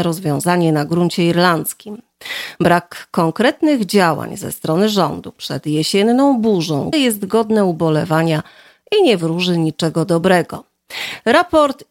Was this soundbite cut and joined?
yes; 1 cut; at 6.9 s

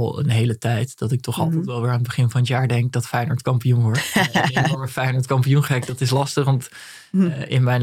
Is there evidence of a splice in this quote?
no; 0 cuts

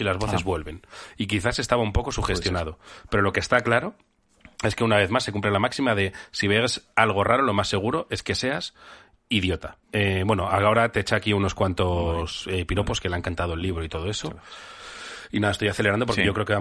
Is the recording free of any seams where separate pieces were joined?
no; 1 cut; at 9.8 s

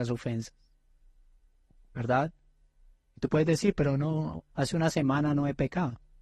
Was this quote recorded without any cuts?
no; 1 cut; at 4.4 s

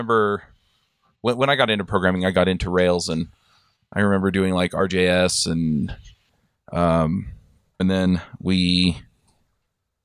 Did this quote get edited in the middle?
yes; 1 cut; at 7.8 s

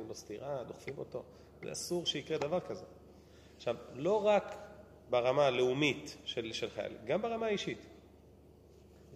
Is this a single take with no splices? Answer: yes; 0 cuts

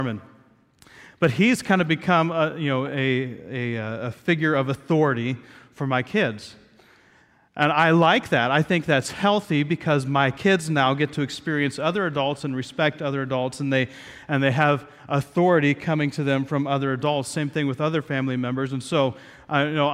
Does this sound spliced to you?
no; 0 cuts

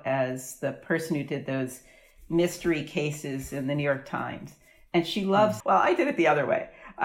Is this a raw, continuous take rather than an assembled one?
no; 1 cut; at 5.6 s

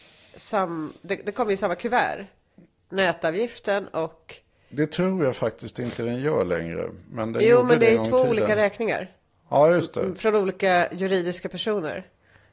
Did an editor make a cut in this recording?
no; 0 cuts

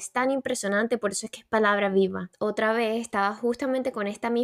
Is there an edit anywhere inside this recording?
yes; 1 cut; at 2.3 s

